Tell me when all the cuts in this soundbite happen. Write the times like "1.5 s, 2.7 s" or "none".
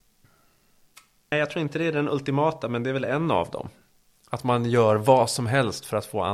1.3 s